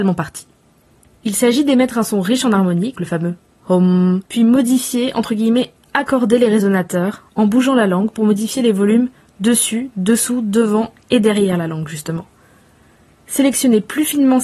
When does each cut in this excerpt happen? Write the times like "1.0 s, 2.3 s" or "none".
2.9 s, 4.3 s